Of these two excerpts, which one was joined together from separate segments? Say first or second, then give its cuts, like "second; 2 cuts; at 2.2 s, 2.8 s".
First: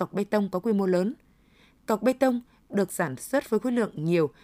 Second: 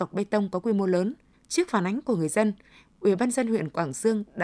second; 1 cut; at 1.3 s